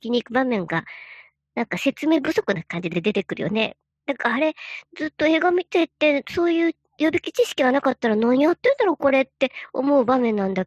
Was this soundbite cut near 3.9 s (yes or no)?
no